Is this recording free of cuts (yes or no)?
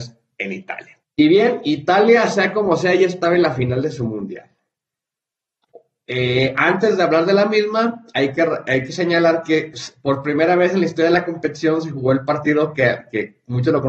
no